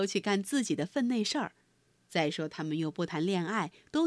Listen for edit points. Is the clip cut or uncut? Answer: uncut